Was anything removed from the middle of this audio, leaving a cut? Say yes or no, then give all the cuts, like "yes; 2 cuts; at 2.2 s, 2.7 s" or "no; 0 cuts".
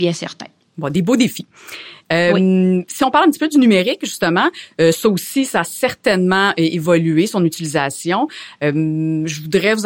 no; 0 cuts